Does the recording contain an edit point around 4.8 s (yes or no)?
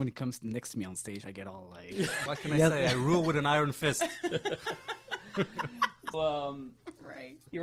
no